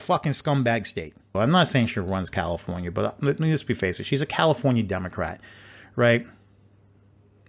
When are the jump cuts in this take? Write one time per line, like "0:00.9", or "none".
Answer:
0:01.3